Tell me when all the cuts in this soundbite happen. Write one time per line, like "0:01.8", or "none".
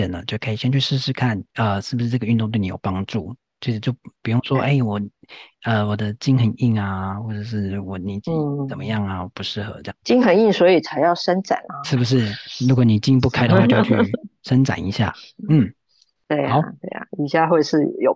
none